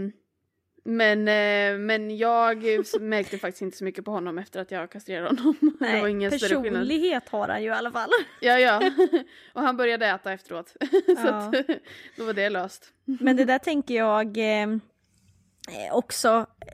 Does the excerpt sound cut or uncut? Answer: uncut